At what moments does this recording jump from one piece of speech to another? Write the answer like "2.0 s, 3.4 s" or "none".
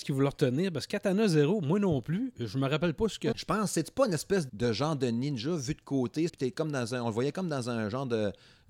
3.3 s, 4.5 s, 6.3 s